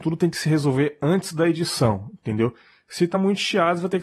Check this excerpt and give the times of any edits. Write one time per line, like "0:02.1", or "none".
none